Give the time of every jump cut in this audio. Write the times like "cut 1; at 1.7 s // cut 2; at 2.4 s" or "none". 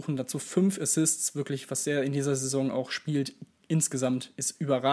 none